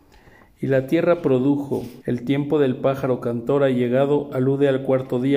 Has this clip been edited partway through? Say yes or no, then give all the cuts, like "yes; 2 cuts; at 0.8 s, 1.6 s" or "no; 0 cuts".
yes; 1 cut; at 2.0 s